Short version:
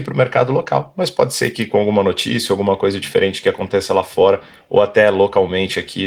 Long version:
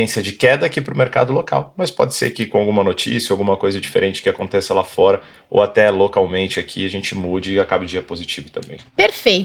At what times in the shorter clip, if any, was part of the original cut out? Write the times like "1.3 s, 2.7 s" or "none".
none